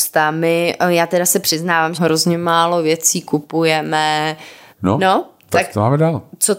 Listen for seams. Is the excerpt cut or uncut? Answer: cut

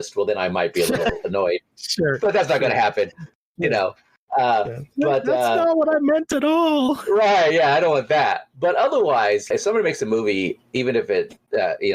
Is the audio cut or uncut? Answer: uncut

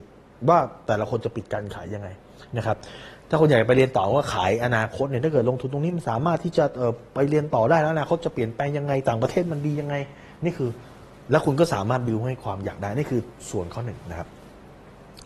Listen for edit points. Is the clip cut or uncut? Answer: uncut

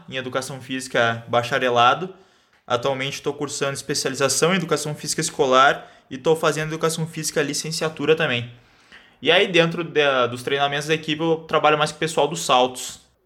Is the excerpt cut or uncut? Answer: uncut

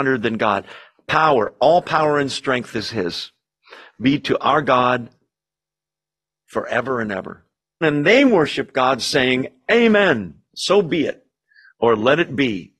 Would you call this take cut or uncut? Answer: cut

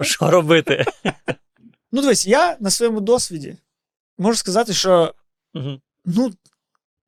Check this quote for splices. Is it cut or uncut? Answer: uncut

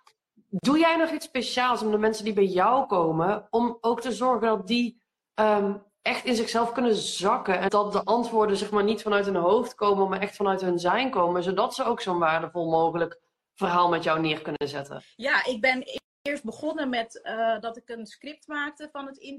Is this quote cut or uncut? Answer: cut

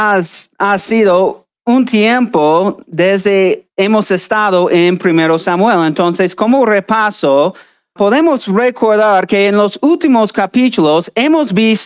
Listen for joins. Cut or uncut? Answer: cut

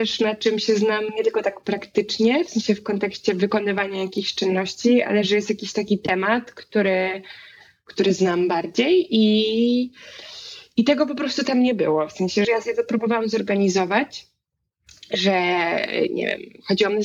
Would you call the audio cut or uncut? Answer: cut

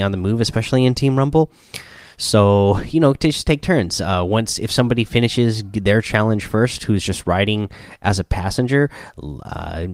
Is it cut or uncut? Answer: uncut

